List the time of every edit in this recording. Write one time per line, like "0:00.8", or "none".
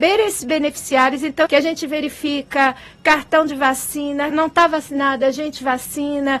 0:01.5
0:04.3